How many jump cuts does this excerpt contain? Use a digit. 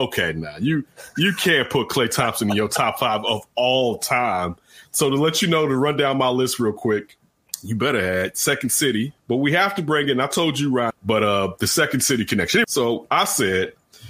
3